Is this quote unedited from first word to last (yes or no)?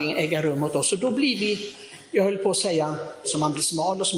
no